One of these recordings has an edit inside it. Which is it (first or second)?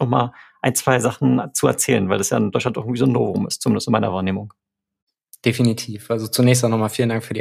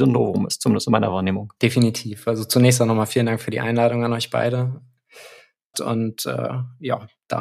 second